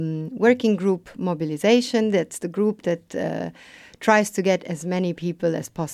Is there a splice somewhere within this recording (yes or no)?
no